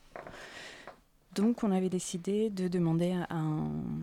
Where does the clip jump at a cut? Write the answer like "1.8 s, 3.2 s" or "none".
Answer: none